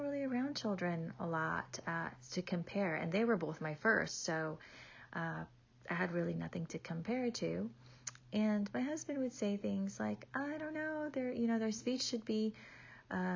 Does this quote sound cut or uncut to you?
uncut